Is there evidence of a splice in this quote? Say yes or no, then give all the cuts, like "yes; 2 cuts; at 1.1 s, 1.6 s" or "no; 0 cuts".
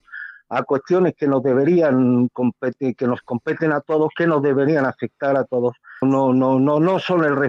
yes; 1 cut; at 6.0 s